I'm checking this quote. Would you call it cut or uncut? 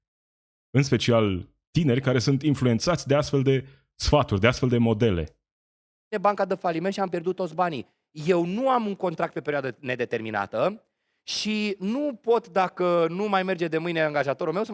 uncut